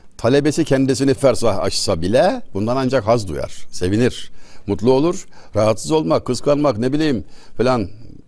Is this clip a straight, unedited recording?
no; 1 cut; at 1.2 s

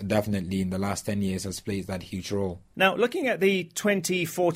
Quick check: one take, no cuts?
no; 1 cut; at 2.7 s

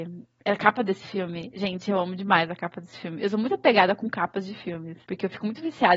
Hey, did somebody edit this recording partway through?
no; 0 cuts

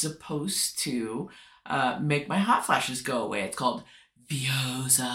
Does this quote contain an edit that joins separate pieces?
no; 0 cuts

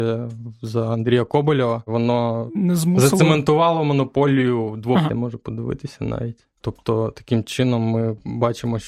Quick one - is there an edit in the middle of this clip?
yes; 3 cuts; at 2.5 s, 5.1 s, 6.6 s

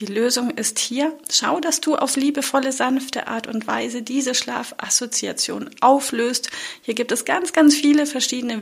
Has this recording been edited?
no; 0 cuts

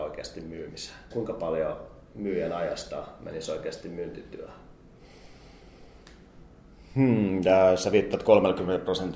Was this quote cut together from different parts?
yes; 1 cut; at 1.1 s

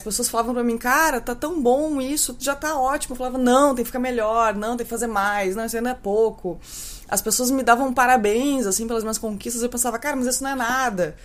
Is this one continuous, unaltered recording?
yes; 0 cuts

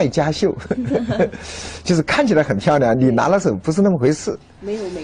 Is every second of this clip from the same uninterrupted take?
yes; 0 cuts

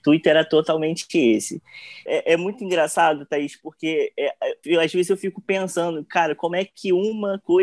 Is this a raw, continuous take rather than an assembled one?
no; 2 cuts; at 2.1 s, 4.6 s

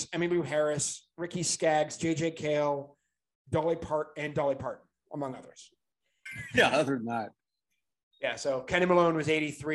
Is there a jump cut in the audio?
yes; 1 cut; at 6.3 s

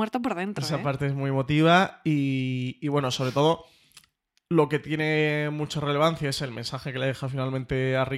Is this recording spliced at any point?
no; 0 cuts

